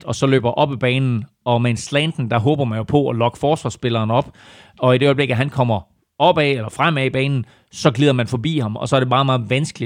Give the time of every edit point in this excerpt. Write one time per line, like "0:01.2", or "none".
none